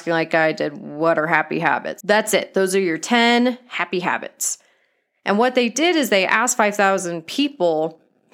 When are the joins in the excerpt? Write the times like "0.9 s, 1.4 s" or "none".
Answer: 2.0 s